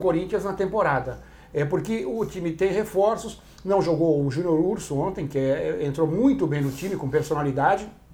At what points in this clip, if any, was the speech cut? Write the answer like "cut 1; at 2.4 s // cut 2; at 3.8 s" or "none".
none